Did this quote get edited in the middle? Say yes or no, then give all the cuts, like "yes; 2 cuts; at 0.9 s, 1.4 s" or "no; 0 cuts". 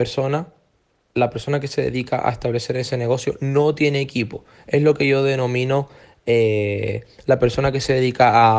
no; 0 cuts